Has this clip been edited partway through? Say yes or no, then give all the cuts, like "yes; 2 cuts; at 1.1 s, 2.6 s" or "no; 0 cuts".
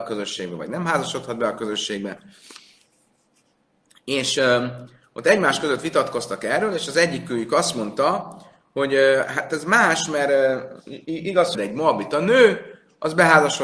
yes; 1 cut; at 11.5 s